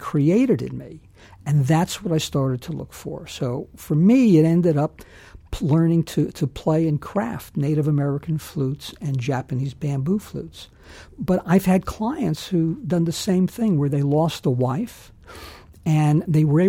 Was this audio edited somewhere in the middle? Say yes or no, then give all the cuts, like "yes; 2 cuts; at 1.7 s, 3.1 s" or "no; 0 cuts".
no; 0 cuts